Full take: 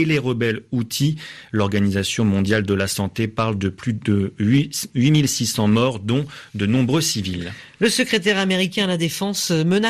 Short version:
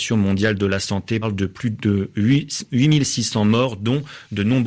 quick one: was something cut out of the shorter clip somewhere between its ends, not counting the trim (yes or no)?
yes